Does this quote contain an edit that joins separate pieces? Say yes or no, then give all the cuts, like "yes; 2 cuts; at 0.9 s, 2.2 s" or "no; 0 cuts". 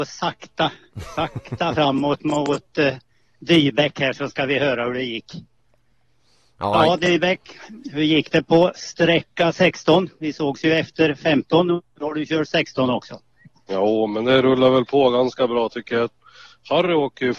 no; 0 cuts